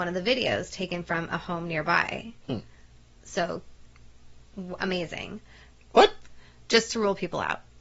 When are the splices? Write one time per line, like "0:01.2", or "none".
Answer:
0:05.7